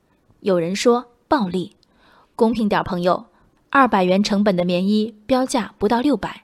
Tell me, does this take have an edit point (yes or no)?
no